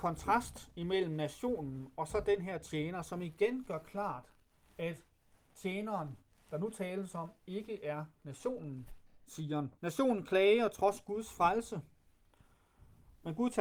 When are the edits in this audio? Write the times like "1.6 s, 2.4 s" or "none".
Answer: 9.8 s